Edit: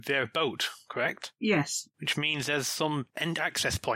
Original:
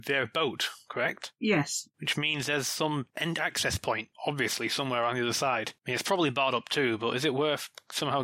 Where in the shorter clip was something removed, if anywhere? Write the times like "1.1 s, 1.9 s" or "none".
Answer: none